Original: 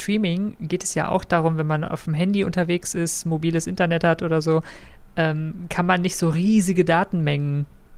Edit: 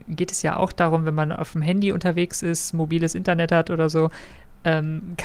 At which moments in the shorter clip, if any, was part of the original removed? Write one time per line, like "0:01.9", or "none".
none